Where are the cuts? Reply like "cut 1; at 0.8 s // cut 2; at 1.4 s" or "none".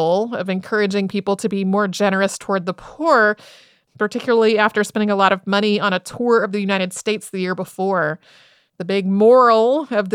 cut 1; at 3.9 s // cut 2; at 8.7 s